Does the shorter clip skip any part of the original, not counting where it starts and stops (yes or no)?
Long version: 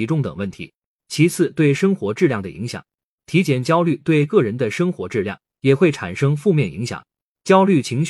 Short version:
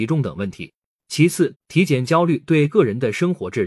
yes